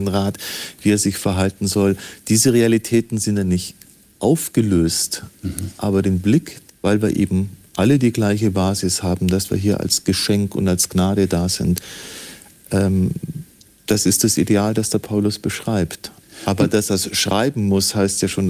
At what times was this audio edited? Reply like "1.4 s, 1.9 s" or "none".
6.7 s

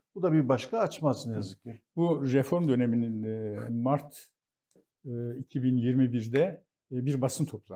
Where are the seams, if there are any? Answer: 3.7 s

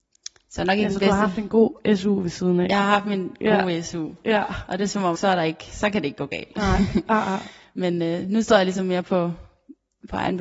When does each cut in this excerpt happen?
5.1 s

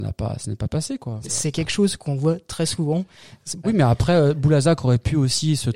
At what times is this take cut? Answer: 1.2 s, 3.6 s

